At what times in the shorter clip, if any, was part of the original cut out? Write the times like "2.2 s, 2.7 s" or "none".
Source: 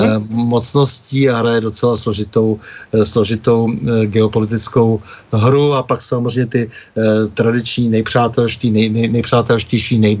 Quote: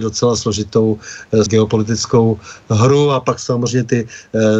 1.5 s